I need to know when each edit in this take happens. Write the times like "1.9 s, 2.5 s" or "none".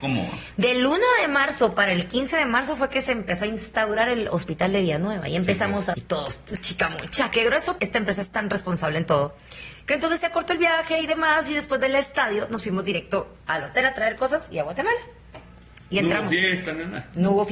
5.9 s, 7.8 s